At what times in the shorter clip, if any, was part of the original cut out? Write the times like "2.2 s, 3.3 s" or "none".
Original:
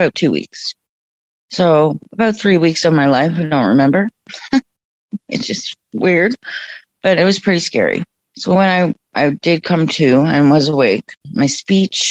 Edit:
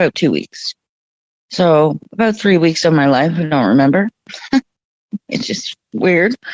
none